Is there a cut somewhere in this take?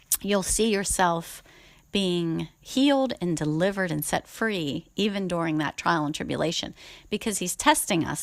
no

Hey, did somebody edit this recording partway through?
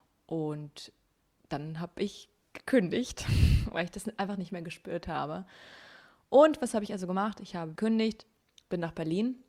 yes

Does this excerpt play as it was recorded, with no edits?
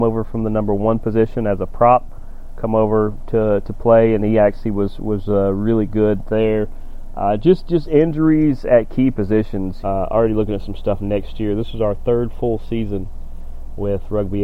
no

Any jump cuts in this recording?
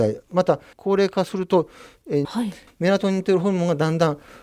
yes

